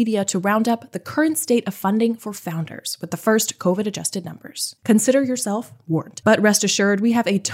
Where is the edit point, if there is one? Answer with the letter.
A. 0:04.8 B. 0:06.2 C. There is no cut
A